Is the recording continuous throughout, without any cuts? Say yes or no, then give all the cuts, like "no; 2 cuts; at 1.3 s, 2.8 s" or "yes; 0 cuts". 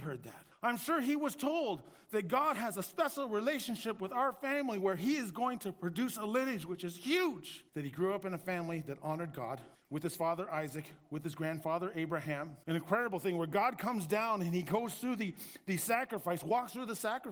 no; 2 cuts; at 7.7 s, 12.6 s